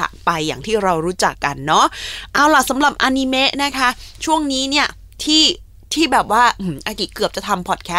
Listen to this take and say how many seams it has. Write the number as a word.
one